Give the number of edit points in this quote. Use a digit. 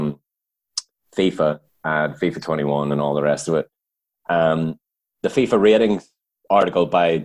1